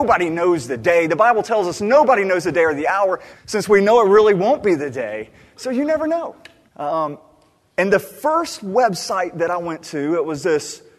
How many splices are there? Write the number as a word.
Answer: two